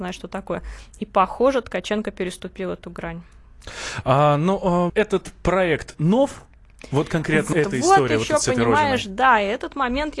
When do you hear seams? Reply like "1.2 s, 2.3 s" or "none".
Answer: 4.9 s, 7.5 s